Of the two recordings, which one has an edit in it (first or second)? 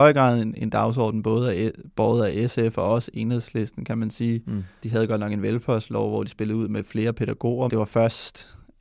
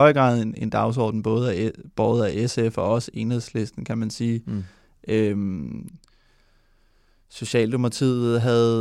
first